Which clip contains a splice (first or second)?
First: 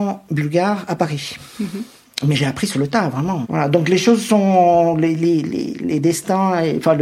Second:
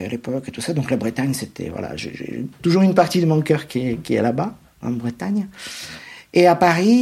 first